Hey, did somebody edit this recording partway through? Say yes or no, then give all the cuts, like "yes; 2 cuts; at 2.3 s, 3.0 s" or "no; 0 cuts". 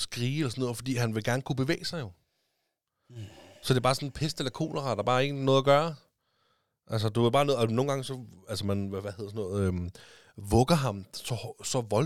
no; 0 cuts